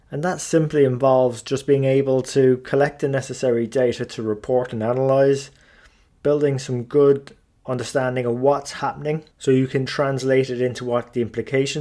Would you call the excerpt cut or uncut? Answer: cut